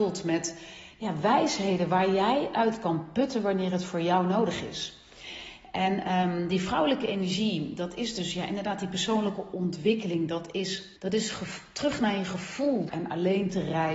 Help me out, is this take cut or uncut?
cut